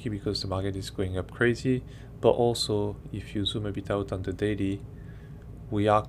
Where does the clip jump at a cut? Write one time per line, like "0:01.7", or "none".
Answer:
none